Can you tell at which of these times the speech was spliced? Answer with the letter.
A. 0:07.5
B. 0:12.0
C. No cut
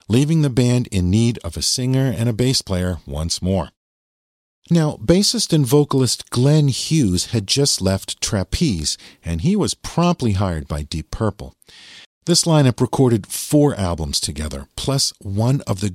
B